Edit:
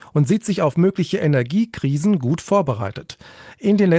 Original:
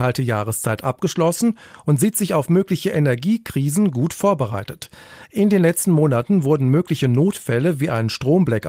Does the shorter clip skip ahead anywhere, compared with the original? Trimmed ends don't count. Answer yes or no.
no